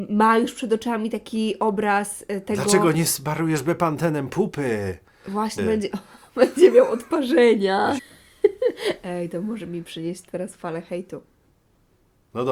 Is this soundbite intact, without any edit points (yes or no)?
no